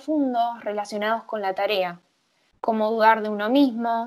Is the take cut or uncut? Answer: uncut